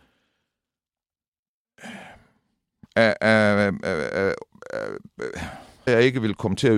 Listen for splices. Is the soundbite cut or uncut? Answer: cut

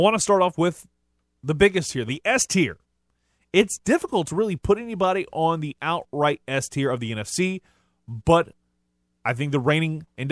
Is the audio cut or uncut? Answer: cut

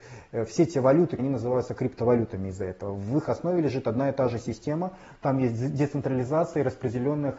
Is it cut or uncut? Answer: cut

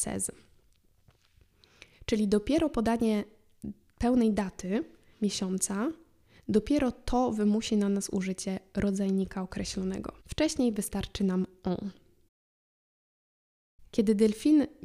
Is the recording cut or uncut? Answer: cut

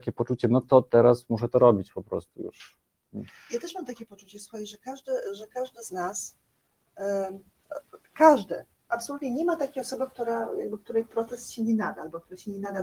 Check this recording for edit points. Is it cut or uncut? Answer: uncut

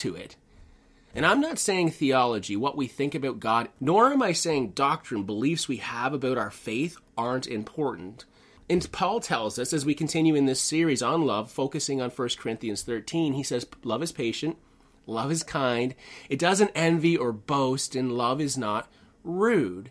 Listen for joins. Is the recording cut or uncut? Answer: cut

